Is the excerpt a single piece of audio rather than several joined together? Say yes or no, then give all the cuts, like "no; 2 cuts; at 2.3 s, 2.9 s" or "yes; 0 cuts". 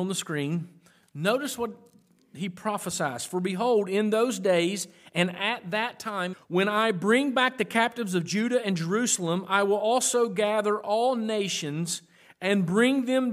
no; 1 cut; at 6.3 s